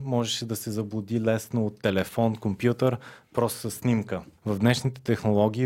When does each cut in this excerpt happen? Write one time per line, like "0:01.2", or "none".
0:04.4